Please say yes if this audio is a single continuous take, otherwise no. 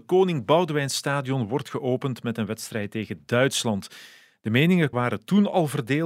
no